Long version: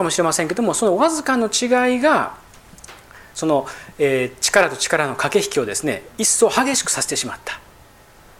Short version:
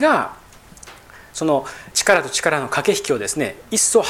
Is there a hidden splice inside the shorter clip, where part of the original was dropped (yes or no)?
yes